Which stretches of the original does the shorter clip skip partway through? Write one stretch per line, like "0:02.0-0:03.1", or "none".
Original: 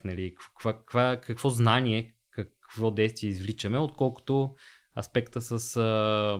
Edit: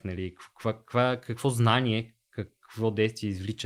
none